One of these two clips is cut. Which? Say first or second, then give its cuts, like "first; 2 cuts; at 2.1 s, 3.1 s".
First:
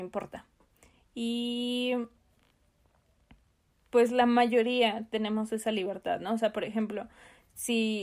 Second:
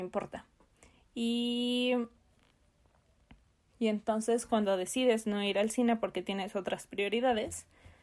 second; 1 cut; at 3.7 s